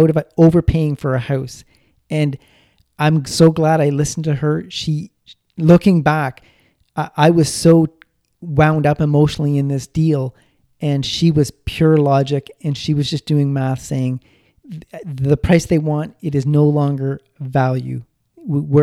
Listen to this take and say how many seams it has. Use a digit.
0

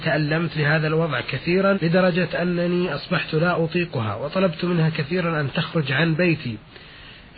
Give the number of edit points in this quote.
1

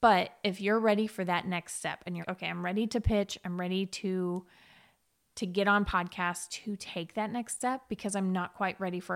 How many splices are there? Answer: 1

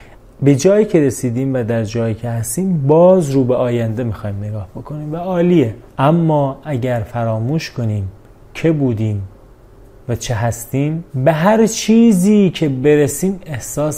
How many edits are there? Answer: 2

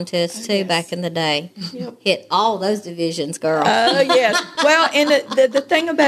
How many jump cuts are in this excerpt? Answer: 0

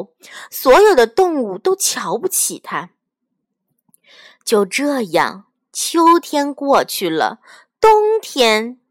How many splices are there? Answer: 0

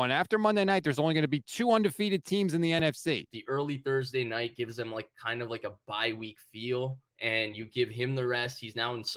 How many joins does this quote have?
2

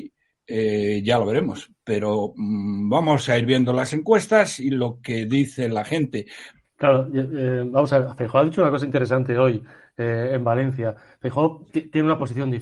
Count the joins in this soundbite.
1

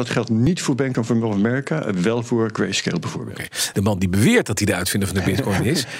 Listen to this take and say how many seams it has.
1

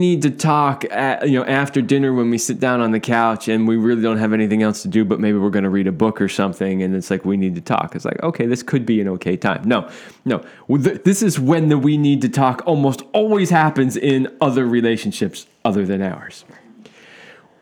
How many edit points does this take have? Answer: 0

